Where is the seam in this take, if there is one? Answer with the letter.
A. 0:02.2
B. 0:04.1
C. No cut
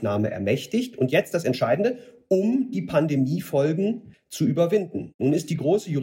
B